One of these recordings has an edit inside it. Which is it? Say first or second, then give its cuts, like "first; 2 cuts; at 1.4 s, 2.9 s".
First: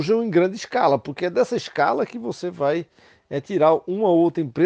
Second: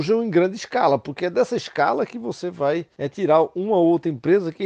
second; 1 cut; at 2.9 s